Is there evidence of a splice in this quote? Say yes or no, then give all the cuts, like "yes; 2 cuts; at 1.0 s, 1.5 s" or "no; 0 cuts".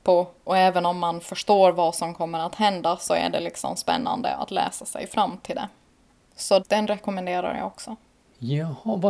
yes; 1 cut; at 6.6 s